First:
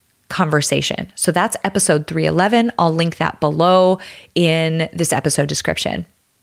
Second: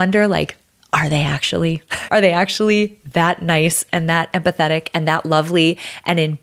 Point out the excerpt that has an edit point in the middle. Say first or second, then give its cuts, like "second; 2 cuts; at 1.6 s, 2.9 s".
second; 1 cut; at 2.1 s